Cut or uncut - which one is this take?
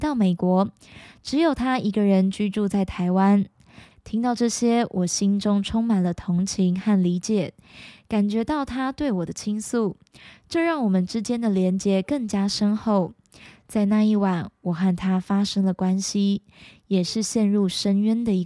cut